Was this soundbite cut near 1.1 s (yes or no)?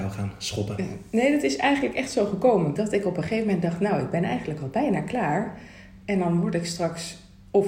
no